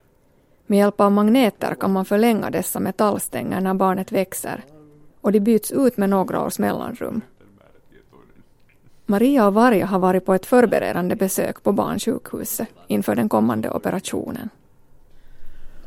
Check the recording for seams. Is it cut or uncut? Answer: uncut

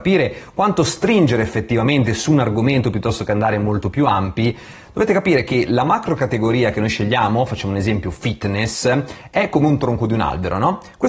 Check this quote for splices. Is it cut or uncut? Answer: uncut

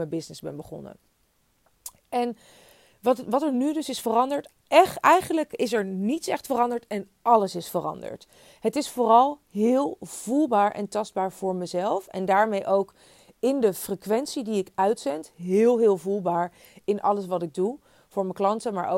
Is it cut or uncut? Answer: uncut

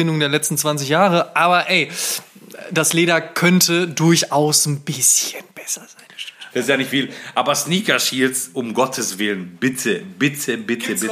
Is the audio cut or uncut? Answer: cut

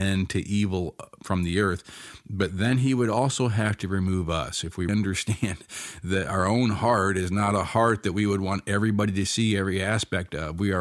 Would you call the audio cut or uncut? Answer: cut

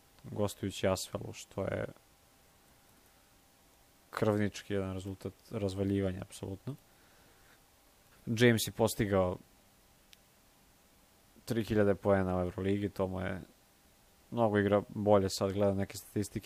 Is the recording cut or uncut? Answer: cut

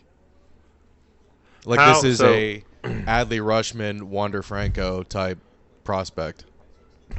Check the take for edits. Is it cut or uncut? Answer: uncut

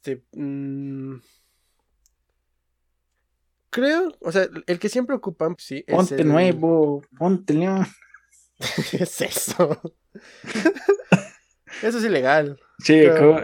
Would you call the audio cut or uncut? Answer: cut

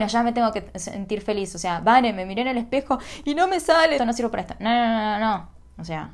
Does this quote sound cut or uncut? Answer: cut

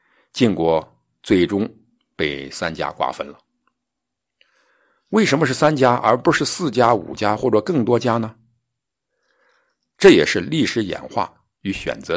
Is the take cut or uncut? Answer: uncut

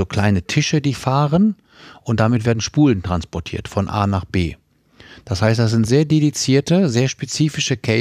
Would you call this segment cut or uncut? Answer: uncut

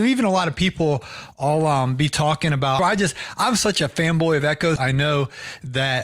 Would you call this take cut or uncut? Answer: cut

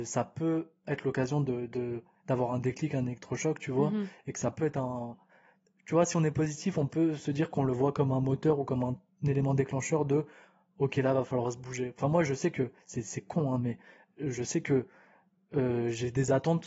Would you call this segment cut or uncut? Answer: uncut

